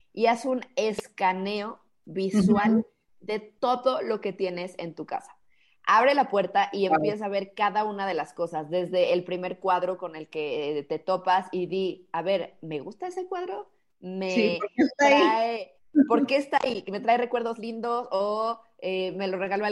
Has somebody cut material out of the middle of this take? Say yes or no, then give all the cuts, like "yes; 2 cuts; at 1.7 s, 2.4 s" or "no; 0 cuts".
no; 0 cuts